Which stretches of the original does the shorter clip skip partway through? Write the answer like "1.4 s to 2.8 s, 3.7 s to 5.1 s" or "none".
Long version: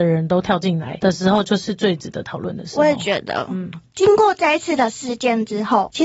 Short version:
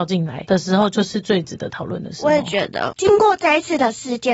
3.5 s to 3.9 s